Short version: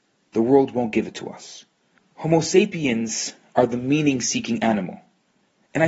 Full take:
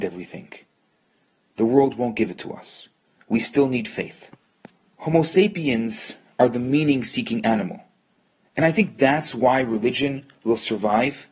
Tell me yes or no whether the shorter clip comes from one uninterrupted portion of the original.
no